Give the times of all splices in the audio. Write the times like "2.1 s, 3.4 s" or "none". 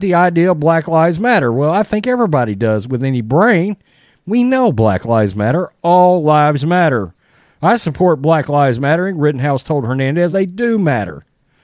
10.3 s